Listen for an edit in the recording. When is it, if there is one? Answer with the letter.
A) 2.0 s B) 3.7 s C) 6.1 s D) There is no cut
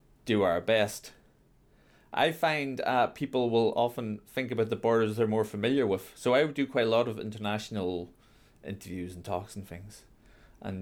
D